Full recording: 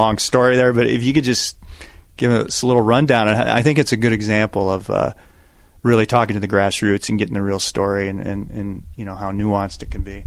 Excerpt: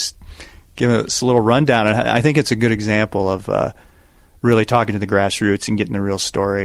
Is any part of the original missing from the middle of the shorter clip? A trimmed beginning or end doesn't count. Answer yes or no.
no